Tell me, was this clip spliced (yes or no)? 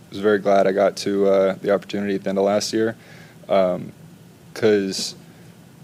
no